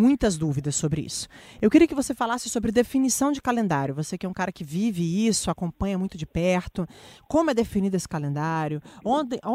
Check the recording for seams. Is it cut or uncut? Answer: uncut